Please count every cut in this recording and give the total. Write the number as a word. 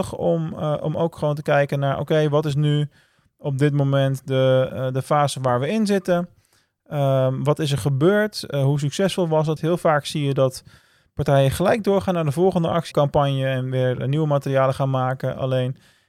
two